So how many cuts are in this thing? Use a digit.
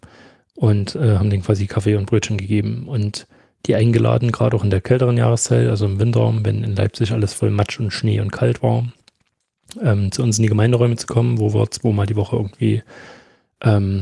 0